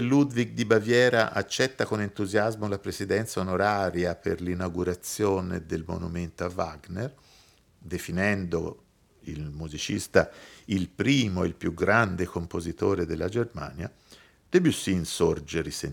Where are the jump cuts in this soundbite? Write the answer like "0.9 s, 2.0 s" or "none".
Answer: none